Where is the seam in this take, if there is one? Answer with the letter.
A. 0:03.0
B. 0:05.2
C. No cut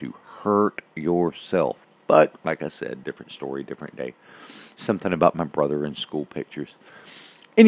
C